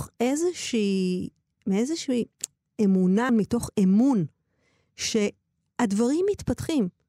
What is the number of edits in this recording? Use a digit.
1